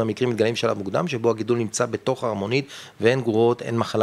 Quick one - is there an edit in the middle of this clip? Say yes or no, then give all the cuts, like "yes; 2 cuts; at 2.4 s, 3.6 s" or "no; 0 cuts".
no; 0 cuts